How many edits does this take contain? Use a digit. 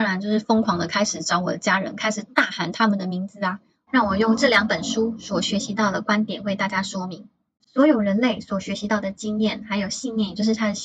1